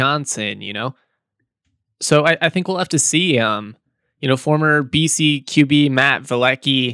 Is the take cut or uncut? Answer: uncut